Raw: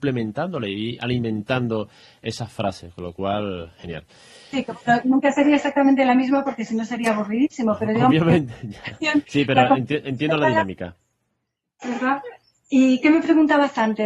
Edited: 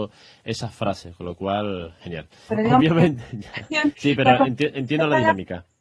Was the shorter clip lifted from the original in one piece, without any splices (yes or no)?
no